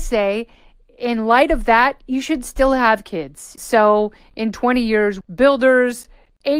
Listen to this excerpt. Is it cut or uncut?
cut